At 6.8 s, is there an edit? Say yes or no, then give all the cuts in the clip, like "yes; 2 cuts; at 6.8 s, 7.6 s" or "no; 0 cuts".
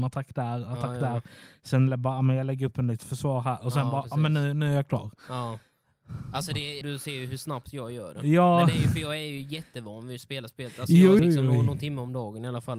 yes; 2 cuts; at 6.8 s, 11.2 s